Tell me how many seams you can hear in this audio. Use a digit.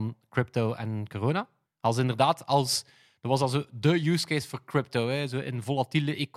1